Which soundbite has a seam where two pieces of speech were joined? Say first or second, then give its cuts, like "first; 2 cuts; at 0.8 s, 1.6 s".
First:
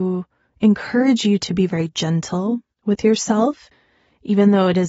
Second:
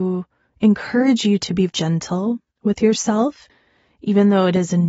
second; 1 cut; at 1.7 s